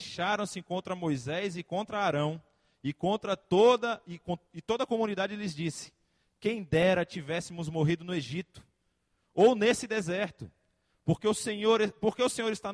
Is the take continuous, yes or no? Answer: yes